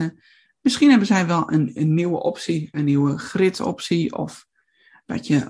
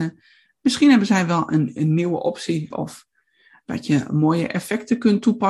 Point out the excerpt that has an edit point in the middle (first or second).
second